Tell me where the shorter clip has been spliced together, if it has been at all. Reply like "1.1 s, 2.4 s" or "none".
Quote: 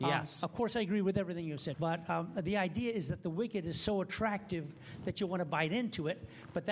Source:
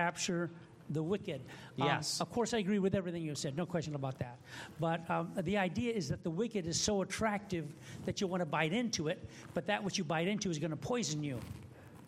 1.7 s